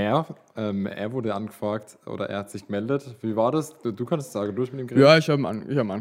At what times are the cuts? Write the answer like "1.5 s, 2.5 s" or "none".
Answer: none